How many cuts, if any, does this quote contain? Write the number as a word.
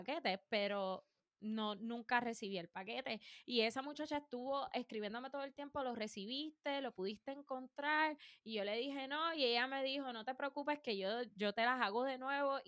zero